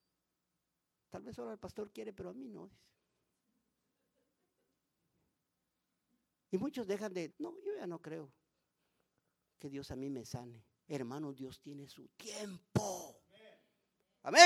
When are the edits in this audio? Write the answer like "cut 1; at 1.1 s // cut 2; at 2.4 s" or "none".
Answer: cut 1; at 7.3 s // cut 2; at 10.9 s